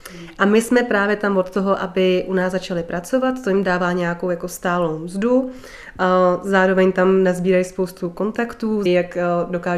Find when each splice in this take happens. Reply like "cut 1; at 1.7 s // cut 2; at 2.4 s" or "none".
cut 1; at 8.9 s